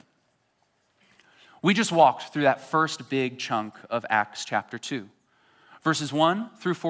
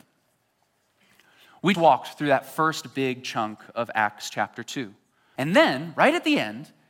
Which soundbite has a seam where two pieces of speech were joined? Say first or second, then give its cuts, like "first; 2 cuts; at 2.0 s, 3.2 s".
second; 2 cuts; at 1.7 s, 5.4 s